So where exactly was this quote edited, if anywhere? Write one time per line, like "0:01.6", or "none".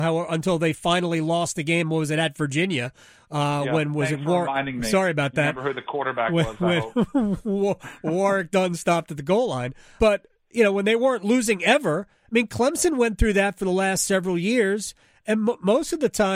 0:10.0